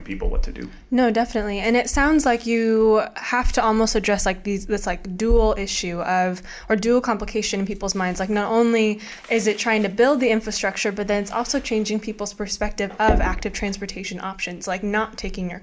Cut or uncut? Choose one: uncut